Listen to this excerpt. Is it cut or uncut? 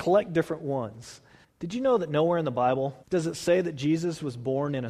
cut